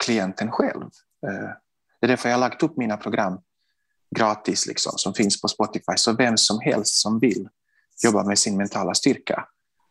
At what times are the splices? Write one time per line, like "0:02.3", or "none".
none